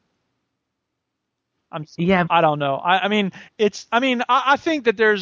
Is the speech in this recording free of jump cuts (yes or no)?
no